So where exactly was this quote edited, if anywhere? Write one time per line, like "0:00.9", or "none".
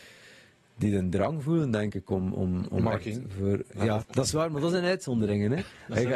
0:04.0